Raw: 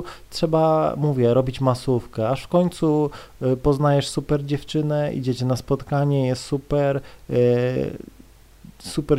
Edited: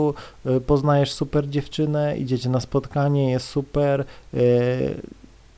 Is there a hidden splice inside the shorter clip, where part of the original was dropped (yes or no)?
no